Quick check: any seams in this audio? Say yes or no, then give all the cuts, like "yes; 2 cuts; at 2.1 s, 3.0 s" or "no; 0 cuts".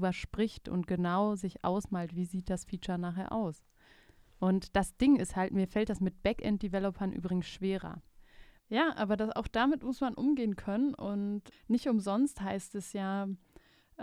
yes; 2 cuts; at 8.6 s, 11.5 s